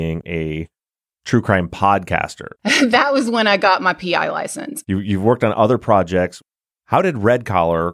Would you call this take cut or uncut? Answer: cut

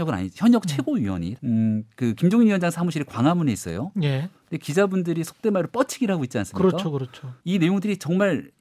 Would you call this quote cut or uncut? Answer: cut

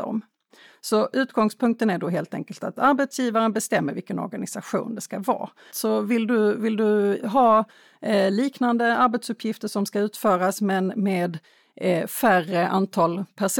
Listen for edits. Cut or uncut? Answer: cut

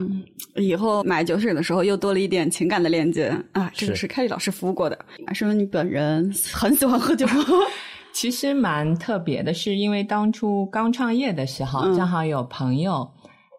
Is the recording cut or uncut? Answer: cut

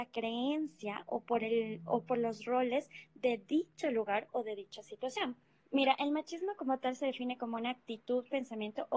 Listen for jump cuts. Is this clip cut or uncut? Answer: cut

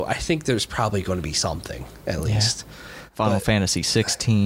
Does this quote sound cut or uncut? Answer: uncut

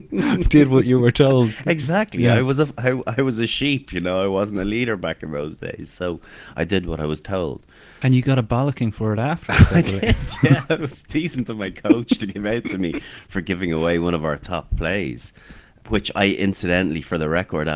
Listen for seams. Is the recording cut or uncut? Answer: cut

